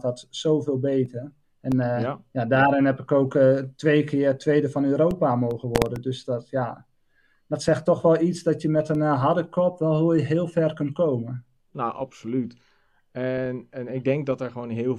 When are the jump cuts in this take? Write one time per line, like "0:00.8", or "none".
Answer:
none